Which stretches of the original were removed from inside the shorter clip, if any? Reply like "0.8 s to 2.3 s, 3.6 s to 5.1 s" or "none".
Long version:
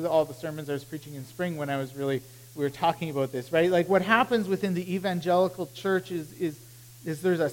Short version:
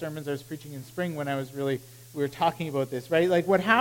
none